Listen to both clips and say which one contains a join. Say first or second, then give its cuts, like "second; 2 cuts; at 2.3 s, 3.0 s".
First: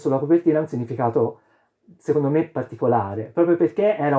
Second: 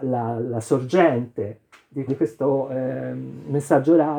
second; 1 cut; at 2.1 s